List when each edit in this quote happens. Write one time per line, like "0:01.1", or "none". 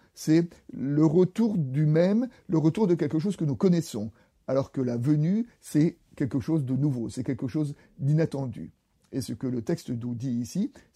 none